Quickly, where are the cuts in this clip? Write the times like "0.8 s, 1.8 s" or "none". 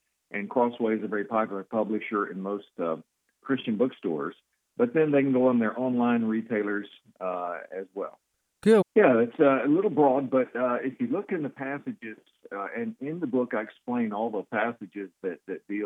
8.8 s